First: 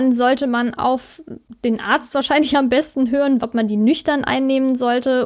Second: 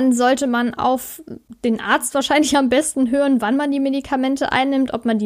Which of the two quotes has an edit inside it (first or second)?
first